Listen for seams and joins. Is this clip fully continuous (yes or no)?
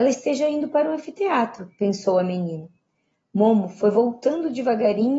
yes